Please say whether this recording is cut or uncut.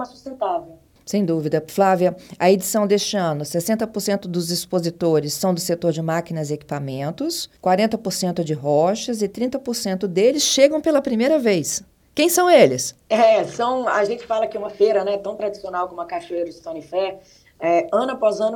cut